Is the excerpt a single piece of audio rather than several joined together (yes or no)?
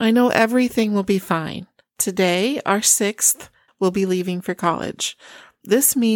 no